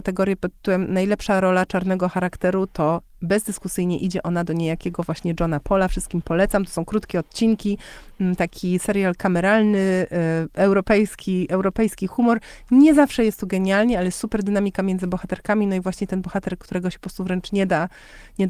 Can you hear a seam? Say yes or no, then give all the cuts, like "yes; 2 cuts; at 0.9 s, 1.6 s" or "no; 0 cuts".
no; 0 cuts